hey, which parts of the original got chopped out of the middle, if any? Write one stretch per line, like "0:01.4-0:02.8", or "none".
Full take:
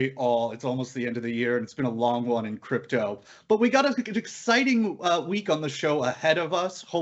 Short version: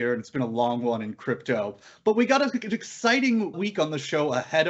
0:05.0-0:05.2